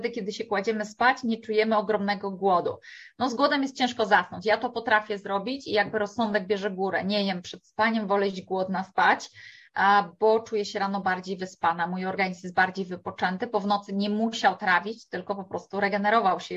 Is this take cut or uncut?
uncut